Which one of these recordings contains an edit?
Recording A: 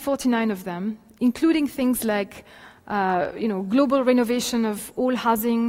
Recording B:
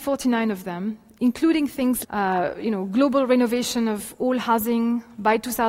B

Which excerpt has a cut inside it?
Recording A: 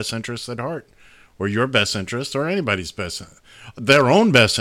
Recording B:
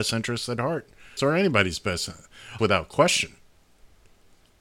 B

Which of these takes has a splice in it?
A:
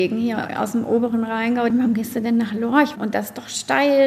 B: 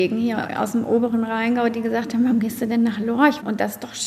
A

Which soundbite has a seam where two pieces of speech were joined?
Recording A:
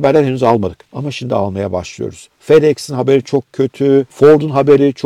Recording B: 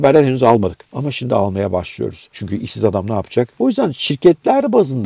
B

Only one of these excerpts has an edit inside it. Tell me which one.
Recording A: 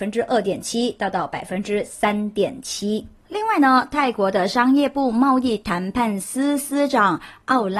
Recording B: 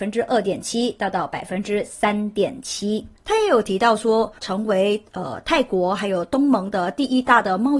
B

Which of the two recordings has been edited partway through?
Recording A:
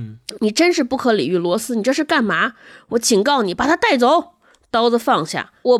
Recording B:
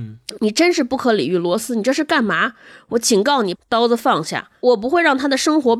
B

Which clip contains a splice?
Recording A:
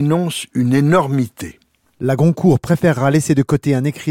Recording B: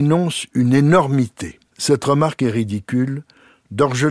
B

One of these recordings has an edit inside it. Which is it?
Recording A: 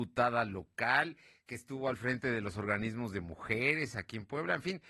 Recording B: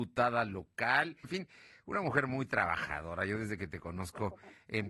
B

